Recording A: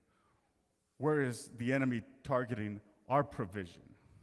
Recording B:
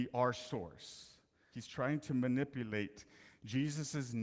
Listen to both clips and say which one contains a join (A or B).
B